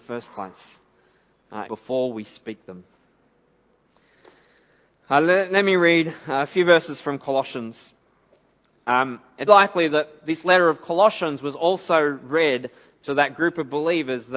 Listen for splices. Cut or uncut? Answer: cut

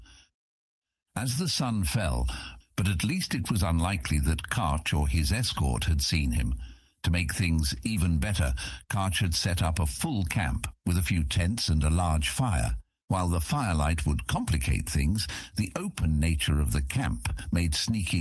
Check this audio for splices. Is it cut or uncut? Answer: cut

